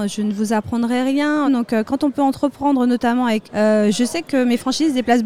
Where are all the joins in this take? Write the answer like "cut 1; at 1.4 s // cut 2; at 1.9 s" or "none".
cut 1; at 1.5 s // cut 2; at 3.5 s

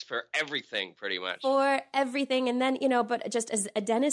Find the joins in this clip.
none

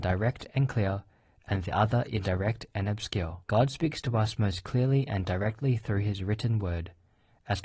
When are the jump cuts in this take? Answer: cut 1; at 3.4 s

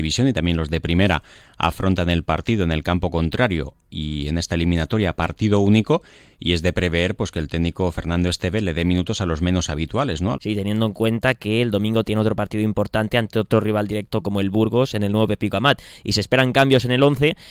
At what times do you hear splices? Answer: cut 1; at 10.3 s

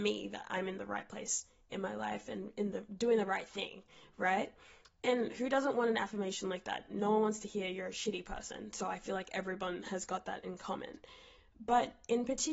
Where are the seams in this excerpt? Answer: none

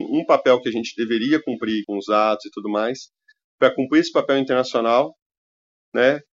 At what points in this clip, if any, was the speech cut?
cut 1; at 1.8 s

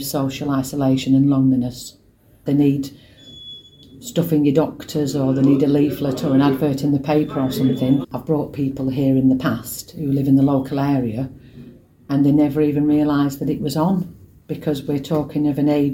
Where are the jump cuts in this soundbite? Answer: cut 1; at 2.5 s // cut 2; at 8.0 s

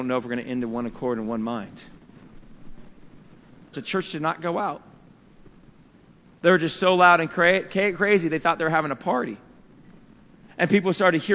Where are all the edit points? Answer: cut 1; at 3.7 s

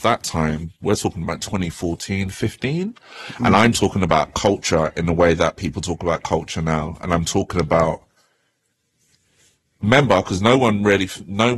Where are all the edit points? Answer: none

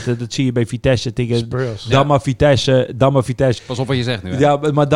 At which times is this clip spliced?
cut 1; at 3.6 s

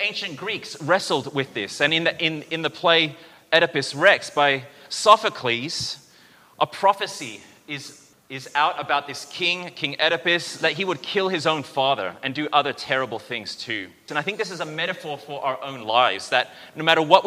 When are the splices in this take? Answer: cut 1; at 8.1 s // cut 2; at 14.1 s

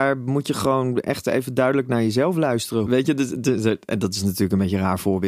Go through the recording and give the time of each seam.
cut 1; at 2.9 s

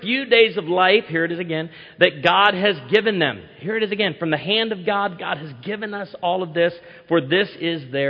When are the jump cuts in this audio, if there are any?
none

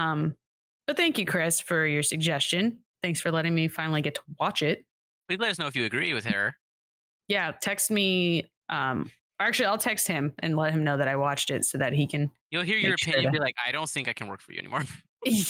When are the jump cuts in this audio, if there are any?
cut 1; at 12.4 s

